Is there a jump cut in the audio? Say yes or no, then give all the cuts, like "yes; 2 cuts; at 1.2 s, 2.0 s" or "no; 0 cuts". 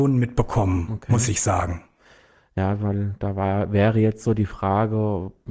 no; 0 cuts